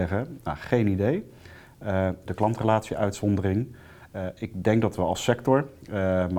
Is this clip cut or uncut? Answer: cut